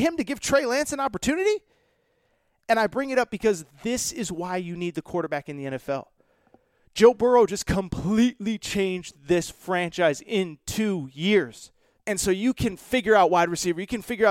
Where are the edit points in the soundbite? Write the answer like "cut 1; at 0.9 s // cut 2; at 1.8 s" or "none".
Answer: cut 1; at 11.9 s